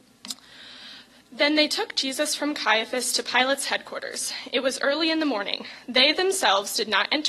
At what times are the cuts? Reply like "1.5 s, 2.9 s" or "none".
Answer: none